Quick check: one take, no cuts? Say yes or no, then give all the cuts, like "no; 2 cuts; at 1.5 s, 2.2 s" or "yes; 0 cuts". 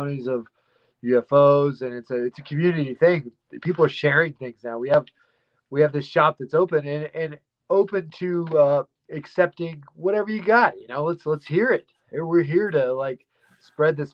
yes; 0 cuts